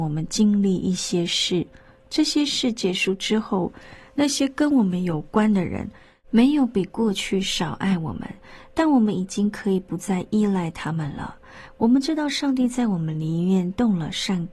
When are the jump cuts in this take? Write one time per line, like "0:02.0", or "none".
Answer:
none